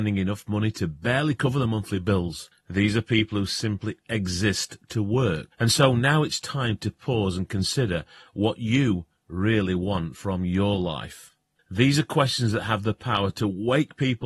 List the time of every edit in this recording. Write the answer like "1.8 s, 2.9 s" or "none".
5.5 s, 11.6 s